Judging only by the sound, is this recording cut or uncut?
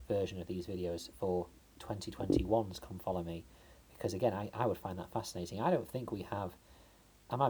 uncut